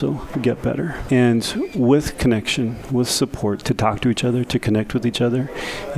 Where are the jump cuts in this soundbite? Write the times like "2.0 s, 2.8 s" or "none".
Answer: 1.1 s, 3.6 s